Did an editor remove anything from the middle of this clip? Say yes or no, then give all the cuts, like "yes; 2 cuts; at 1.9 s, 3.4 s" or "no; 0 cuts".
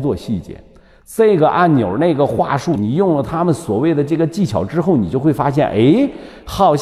yes; 1 cut; at 2.8 s